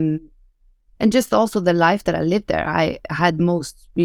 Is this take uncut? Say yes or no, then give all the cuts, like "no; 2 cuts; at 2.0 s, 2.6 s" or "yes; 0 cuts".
yes; 0 cuts